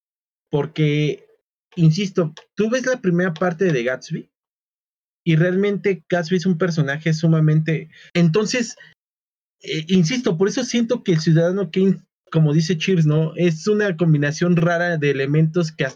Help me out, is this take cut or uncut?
cut